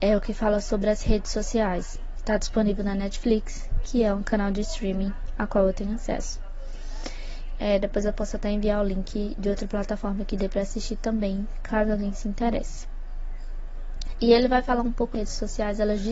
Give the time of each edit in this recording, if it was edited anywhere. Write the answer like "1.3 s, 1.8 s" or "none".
7.5 s

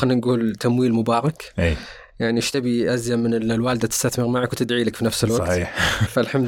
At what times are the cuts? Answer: none

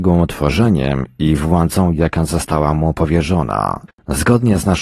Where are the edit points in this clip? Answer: 3.9 s

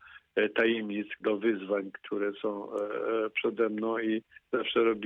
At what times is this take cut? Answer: 1.2 s

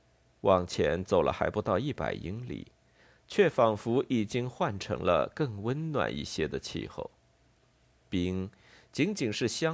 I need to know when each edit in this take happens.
none

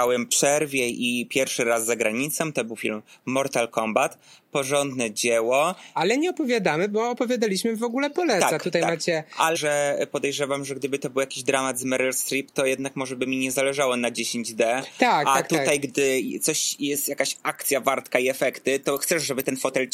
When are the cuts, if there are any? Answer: 9.5 s

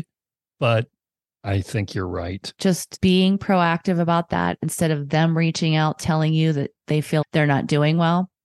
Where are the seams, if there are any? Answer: 2.6 s, 7.2 s

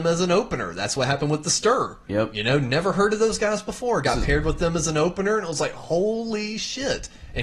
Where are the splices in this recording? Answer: none

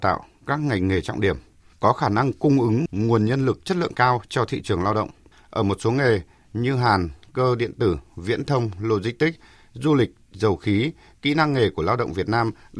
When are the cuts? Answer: 1.7 s, 5.3 s

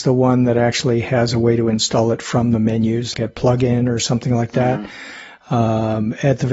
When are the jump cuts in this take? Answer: 3.1 s

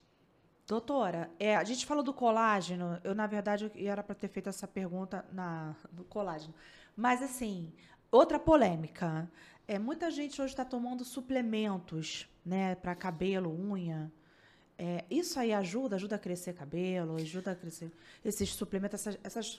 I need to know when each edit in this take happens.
none

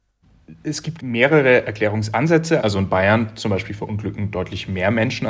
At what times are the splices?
1.0 s, 2.6 s

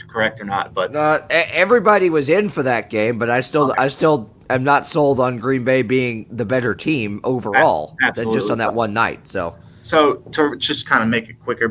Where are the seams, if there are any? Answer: none

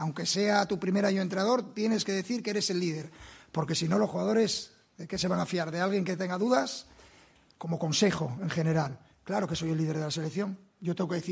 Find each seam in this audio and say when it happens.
none

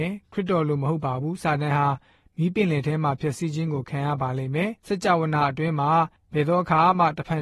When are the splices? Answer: 4.8 s

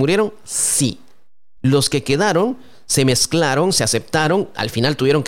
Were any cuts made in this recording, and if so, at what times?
none

